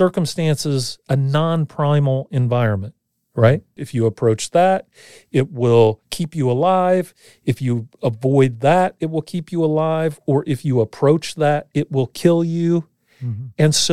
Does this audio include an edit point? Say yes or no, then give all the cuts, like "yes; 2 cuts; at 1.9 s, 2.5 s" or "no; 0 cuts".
yes; 1 cut; at 3.8 s